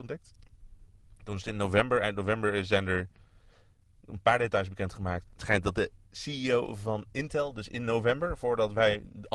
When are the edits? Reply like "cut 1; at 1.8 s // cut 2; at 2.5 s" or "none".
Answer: cut 1; at 5.2 s